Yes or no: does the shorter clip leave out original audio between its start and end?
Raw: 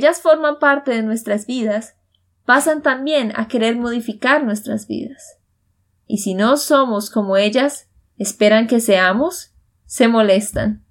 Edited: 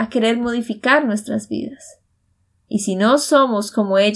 no